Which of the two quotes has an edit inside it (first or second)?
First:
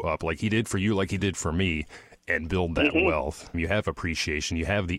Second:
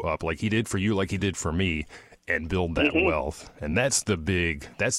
first